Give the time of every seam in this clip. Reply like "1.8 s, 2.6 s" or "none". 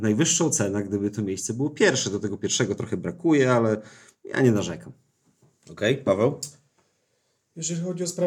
none